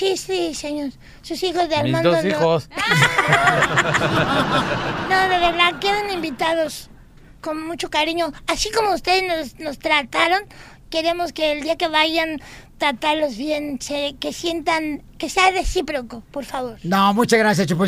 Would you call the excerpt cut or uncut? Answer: uncut